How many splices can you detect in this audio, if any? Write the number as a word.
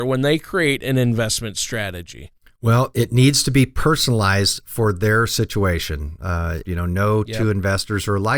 one